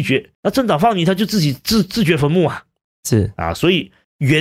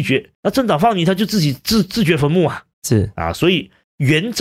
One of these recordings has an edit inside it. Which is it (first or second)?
second